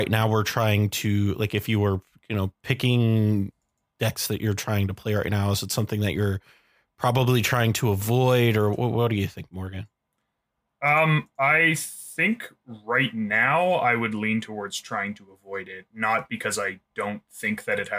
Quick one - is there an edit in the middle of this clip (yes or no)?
no